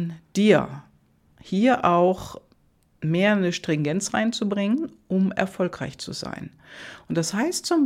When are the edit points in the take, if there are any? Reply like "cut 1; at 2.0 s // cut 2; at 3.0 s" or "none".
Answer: none